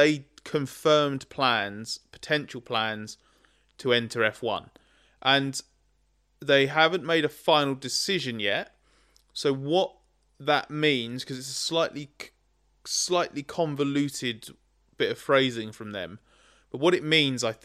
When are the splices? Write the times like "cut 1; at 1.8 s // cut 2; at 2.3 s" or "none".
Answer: none

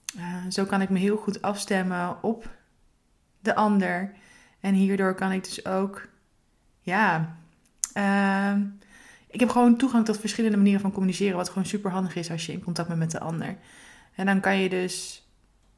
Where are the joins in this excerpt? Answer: none

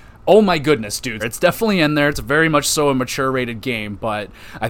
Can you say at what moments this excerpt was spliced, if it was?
cut 1; at 1.2 s

